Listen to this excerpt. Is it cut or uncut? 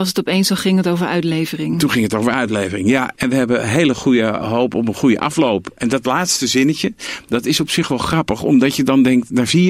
cut